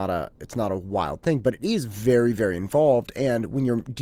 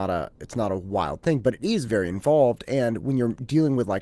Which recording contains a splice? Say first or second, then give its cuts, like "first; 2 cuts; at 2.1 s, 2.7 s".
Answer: second; 1 cut; at 1.9 s